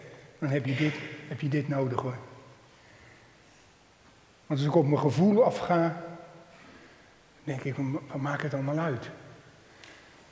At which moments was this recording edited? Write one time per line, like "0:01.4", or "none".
none